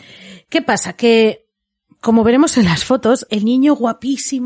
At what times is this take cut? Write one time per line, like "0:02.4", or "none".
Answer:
0:03.3